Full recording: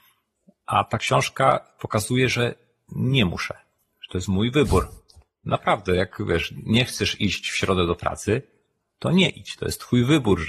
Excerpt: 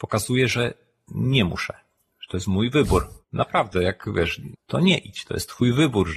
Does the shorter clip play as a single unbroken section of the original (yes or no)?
no